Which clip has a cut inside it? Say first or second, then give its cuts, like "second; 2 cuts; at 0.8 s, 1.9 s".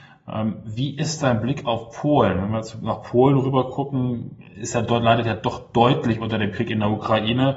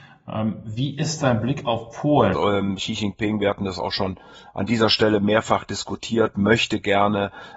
second; 1 cut; at 2.3 s